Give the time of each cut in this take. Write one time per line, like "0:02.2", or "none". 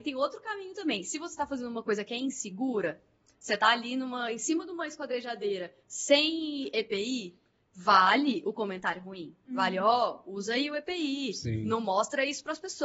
none